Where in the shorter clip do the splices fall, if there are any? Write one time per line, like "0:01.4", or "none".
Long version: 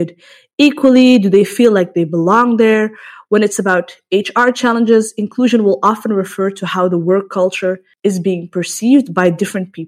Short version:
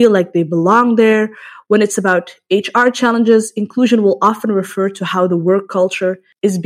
none